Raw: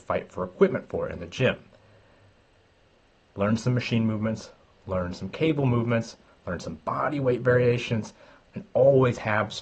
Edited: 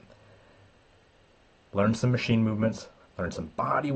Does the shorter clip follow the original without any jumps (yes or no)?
no